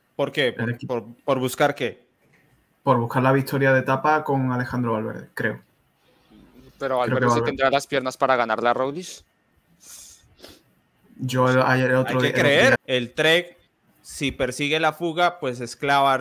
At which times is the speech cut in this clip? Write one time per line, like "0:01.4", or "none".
0:12.8